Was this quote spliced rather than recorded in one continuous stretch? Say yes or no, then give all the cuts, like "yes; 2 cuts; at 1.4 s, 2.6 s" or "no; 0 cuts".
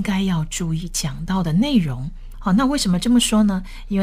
yes; 1 cut; at 2.3 s